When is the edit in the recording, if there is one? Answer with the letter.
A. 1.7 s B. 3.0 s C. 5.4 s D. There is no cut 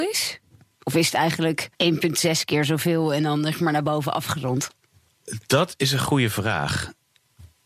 A